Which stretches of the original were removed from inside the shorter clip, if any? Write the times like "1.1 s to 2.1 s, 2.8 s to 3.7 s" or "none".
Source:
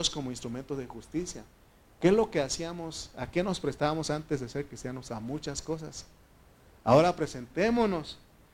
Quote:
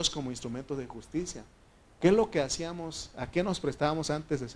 none